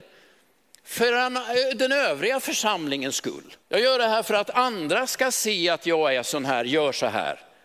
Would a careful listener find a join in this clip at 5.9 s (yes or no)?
no